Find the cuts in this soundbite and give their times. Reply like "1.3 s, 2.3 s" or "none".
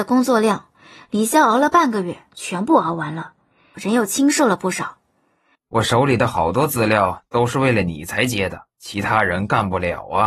3.7 s, 5.5 s, 8.7 s